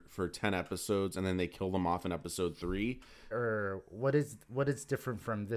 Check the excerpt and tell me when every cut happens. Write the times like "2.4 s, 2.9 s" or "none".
3.3 s

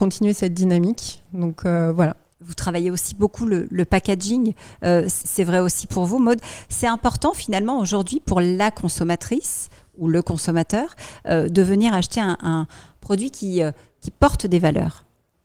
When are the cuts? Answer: 5.9 s

